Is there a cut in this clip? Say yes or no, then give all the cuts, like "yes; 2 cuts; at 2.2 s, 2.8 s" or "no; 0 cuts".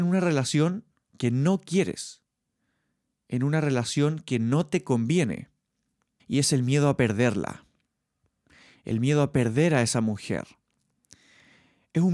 yes; 1 cut; at 6.2 s